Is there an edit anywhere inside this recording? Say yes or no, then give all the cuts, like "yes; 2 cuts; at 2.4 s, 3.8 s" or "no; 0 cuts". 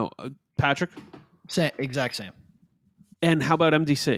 yes; 1 cut; at 3.1 s